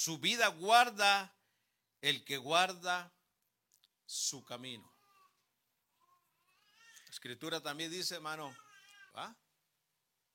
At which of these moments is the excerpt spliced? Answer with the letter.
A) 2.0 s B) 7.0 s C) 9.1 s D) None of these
C